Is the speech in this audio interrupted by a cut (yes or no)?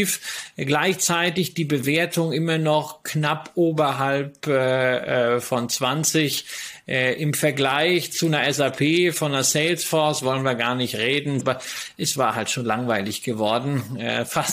yes